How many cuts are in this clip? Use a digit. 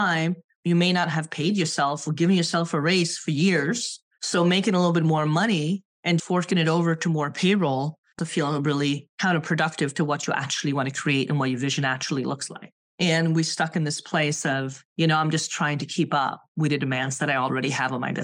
3